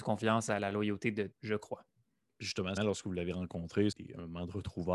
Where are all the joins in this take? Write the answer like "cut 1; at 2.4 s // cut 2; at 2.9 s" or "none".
cut 1; at 1.3 s // cut 2; at 2.8 s // cut 3; at 3.9 s